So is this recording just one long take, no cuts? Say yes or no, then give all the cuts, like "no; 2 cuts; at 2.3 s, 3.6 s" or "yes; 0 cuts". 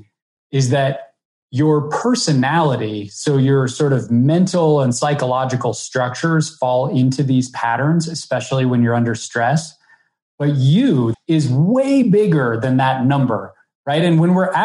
no; 1 cut; at 11.1 s